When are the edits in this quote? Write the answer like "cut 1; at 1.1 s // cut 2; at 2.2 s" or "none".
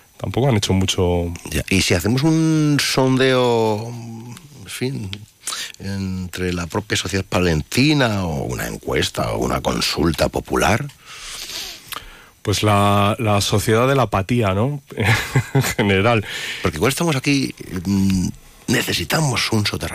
none